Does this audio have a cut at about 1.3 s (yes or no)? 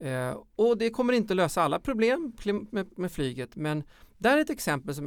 no